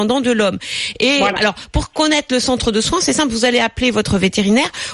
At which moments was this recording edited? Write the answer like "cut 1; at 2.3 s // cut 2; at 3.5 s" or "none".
cut 1; at 1.4 s